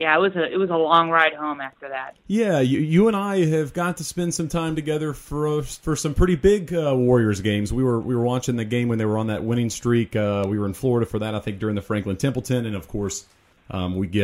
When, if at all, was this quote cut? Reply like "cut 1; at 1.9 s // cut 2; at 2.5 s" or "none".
none